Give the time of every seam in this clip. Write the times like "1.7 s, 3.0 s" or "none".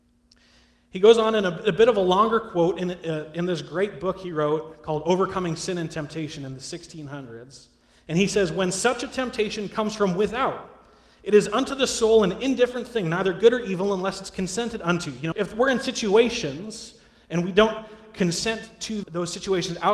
15.3 s, 19.0 s

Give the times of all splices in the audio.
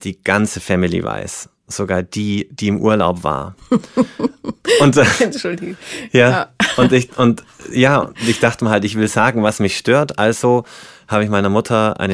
none

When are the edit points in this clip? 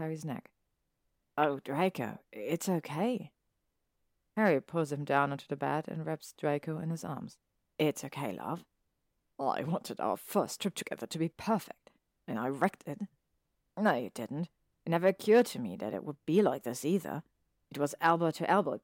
none

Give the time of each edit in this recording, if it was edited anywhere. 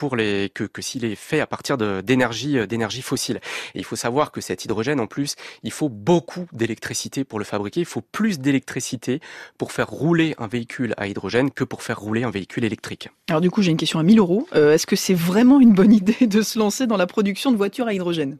none

